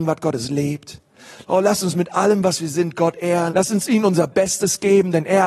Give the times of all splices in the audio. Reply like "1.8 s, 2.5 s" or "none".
1.4 s, 3.5 s